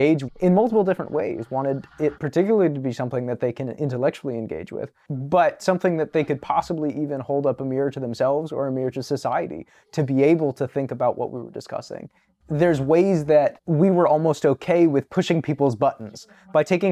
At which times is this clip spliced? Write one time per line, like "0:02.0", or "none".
none

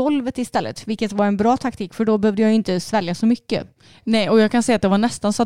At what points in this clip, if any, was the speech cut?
none

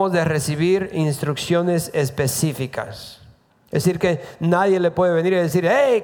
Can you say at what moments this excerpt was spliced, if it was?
0:03.5

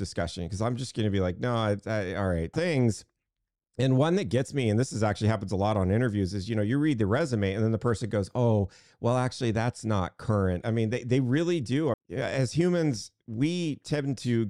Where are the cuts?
0:02.5
0:10.6
0:11.9

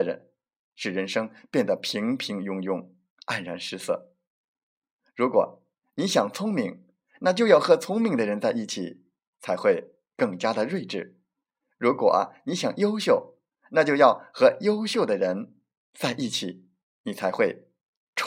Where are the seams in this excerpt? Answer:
none

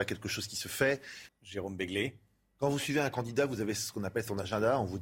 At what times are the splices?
0:01.3

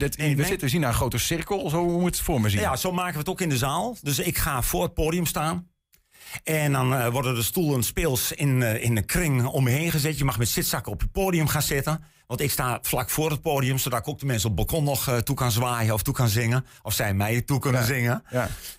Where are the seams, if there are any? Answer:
none

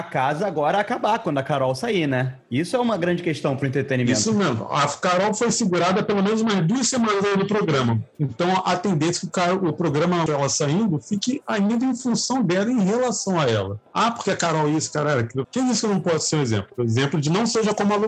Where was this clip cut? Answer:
0:10.3
0:15.4

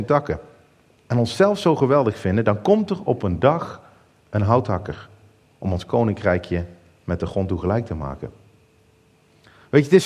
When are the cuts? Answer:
0:01.0
0:05.4

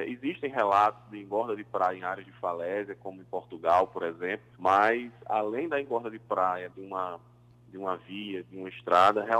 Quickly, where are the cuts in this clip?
0:04.5
0:06.7

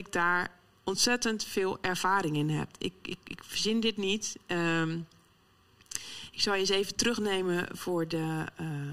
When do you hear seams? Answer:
none

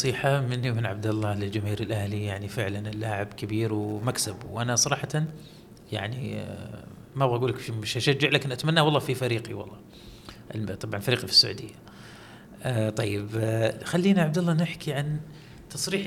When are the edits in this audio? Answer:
none

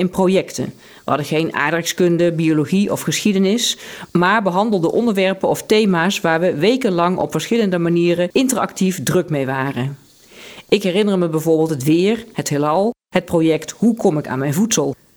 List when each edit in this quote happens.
none

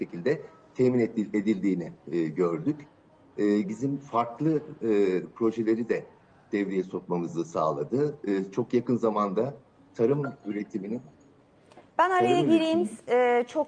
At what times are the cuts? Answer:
0:03.6
0:11.9

